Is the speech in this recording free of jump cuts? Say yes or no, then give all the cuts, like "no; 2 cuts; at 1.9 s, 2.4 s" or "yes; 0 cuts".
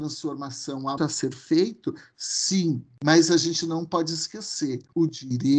no; 1 cut; at 1.0 s